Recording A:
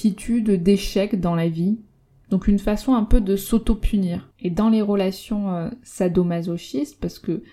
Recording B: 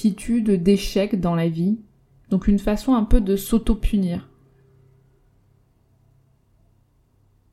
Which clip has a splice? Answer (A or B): A